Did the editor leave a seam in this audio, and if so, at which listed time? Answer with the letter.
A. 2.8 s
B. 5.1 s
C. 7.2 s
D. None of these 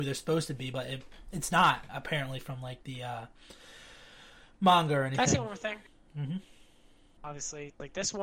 C